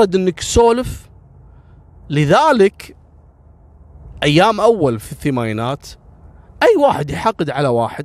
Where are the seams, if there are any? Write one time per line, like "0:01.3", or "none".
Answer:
none